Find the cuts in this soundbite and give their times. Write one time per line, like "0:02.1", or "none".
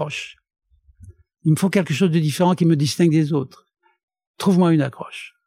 none